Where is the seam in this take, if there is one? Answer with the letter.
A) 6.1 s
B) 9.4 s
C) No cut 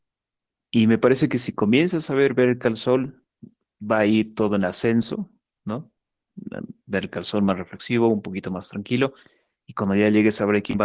C